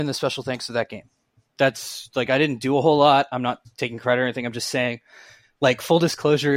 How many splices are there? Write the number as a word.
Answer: zero